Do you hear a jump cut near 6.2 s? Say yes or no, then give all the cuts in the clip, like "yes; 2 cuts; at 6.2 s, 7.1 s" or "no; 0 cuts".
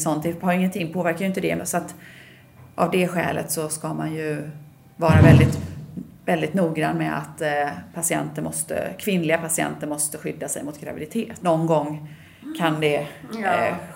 no; 2 cuts; at 1.6 s, 11.4 s